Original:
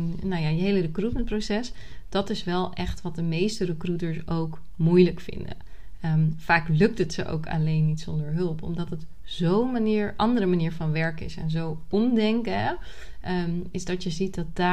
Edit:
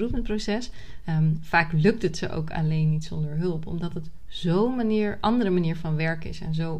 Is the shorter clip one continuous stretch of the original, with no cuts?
no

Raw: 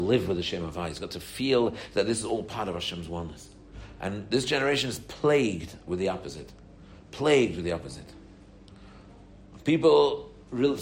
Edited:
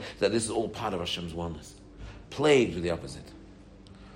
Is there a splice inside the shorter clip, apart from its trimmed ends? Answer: yes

